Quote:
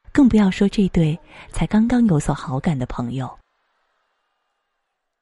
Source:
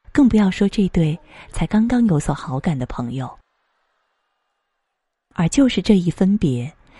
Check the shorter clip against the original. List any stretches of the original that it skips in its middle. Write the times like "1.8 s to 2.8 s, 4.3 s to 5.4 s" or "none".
none